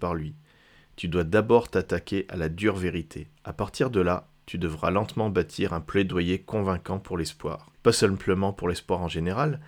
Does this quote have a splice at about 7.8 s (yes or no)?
yes